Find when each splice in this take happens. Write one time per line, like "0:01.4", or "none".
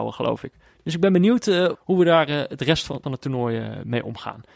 0:01.7
0:03.0